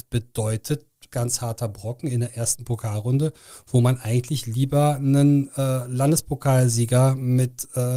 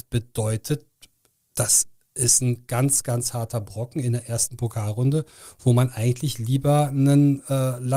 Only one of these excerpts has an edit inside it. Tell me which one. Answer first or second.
first